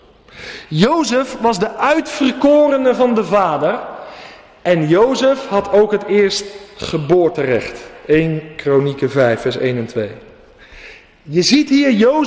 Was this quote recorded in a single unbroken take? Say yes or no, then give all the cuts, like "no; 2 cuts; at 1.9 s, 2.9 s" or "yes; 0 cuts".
yes; 0 cuts